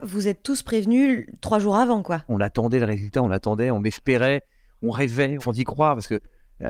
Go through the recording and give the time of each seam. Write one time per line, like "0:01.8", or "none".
0:02.3
0:05.4